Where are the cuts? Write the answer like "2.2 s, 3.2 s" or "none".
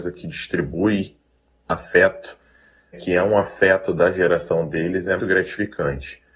2.9 s, 5.2 s